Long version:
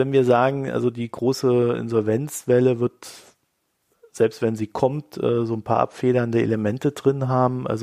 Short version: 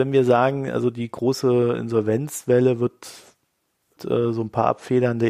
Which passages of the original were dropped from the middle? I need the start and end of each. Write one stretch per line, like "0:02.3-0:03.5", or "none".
0:04.0-0:05.1